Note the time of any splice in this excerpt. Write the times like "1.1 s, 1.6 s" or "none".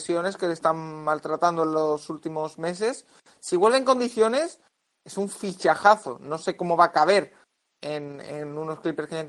none